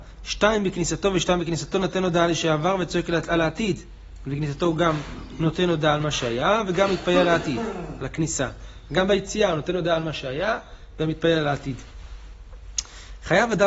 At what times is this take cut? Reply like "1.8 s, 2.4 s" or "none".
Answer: none